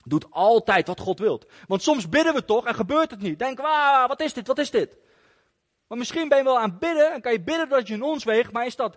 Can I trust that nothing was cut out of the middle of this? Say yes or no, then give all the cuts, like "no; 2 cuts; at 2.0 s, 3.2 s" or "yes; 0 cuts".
yes; 0 cuts